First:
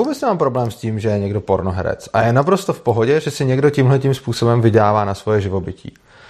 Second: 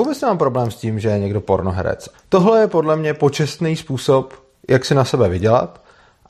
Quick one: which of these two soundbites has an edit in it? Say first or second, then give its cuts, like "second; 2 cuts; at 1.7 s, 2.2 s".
second; 1 cut; at 2.1 s